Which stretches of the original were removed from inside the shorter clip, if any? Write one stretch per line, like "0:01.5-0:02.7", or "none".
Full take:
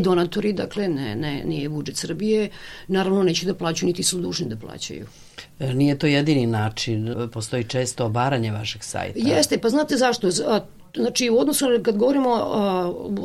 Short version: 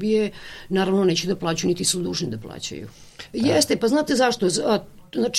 0:05.5-0:09.1